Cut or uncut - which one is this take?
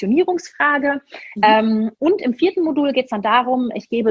cut